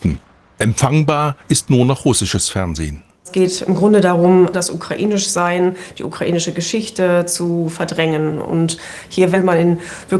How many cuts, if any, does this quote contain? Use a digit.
1